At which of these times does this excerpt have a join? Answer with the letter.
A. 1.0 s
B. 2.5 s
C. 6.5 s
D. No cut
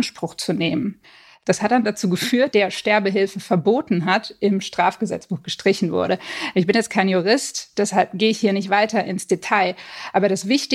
B